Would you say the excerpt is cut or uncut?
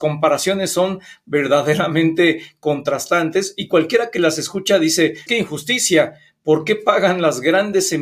cut